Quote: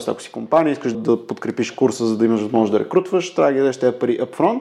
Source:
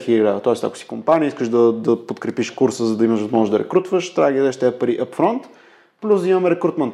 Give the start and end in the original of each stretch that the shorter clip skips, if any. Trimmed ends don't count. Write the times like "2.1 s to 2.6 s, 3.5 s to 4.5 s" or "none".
1.5 s to 1.7 s

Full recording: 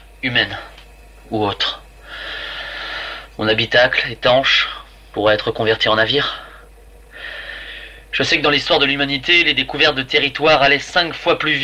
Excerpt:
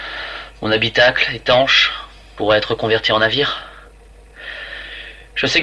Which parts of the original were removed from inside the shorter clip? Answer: none

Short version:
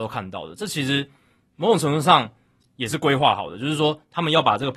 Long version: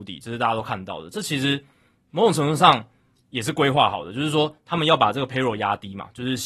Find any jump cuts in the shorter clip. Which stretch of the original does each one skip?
none

